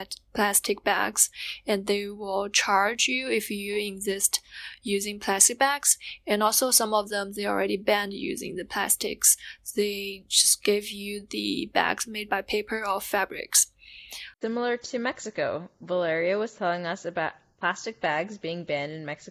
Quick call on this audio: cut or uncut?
cut